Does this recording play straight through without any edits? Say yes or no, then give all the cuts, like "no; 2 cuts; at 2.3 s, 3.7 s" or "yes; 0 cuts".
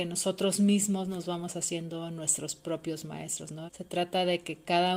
no; 1 cut; at 3.7 s